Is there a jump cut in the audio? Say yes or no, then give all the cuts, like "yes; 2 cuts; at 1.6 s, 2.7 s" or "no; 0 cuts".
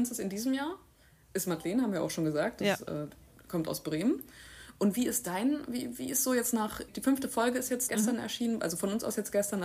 yes; 2 cuts; at 6.9 s, 7.9 s